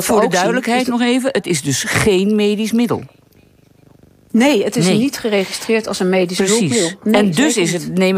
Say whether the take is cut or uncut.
uncut